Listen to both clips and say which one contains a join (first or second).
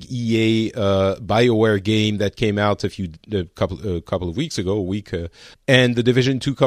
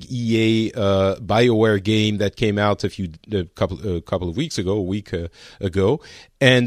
first